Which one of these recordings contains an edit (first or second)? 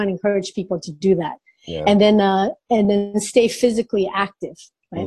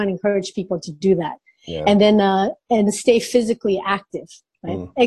second